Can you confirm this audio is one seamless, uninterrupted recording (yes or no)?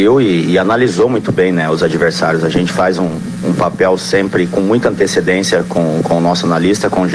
yes